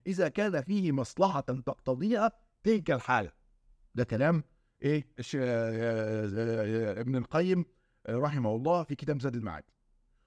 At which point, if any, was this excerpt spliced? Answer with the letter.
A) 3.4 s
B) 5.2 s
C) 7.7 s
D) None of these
B